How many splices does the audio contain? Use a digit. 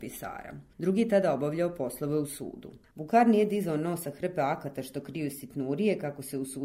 1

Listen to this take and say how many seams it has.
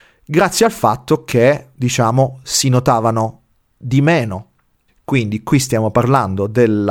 1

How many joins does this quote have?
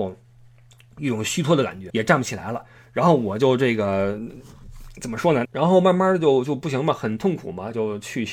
2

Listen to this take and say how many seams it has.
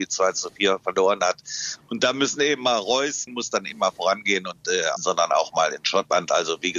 2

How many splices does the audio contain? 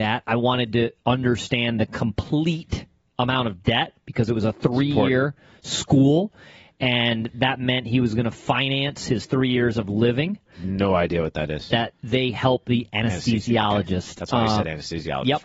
2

